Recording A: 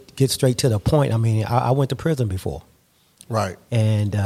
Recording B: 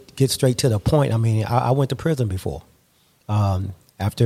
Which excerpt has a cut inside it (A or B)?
A